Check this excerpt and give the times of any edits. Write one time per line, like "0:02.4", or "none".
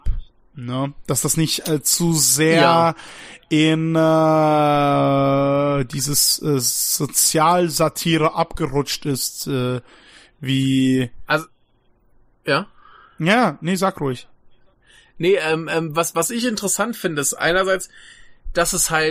none